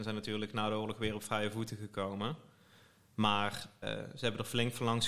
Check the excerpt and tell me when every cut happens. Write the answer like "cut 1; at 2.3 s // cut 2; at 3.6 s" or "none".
cut 1; at 3.8 s